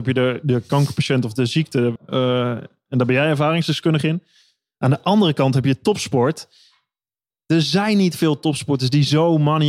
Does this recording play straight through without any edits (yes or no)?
no